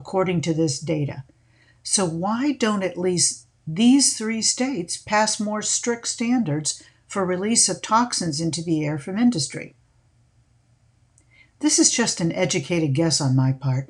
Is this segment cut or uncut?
uncut